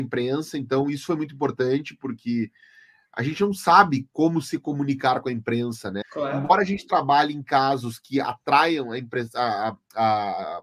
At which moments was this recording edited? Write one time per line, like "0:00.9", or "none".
0:06.0